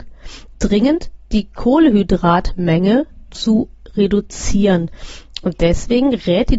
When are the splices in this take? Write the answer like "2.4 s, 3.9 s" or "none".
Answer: none